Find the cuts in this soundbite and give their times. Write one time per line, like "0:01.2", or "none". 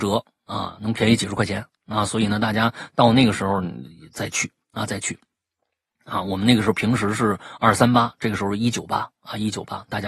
none